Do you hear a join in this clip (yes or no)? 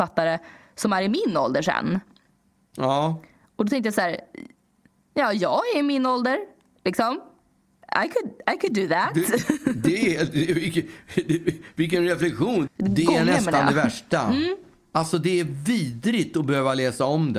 yes